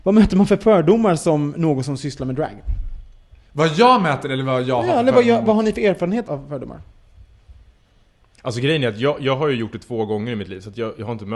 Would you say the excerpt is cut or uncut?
cut